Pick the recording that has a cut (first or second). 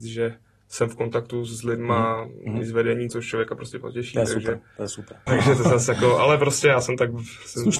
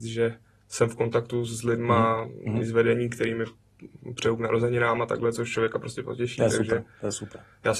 first